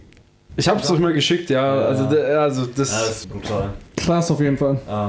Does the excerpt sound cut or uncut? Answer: cut